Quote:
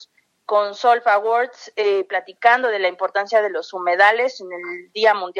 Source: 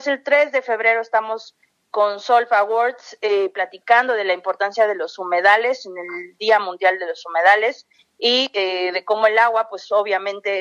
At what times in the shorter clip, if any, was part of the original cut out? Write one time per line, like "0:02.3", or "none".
none